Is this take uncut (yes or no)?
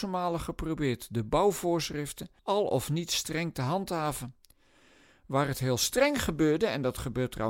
no